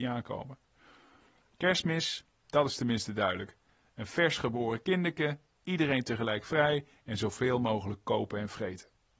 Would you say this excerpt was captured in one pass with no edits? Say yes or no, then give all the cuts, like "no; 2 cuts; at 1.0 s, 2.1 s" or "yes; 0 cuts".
yes; 0 cuts